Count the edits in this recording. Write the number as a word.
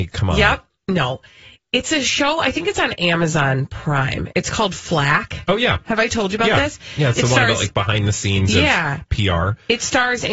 zero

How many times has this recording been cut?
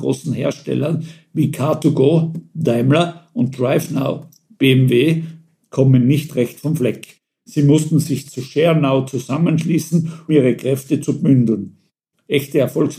one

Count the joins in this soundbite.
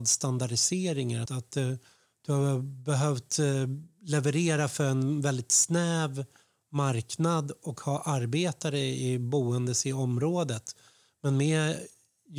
one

